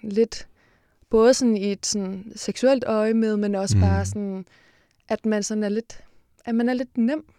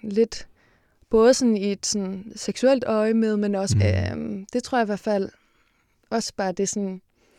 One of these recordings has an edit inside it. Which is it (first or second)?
second